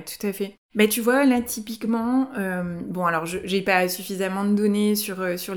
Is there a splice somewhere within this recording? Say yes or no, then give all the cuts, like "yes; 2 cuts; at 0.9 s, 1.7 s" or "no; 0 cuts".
no; 0 cuts